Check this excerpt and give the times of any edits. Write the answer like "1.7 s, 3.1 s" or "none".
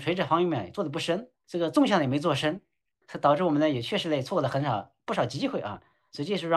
1.4 s, 3.0 s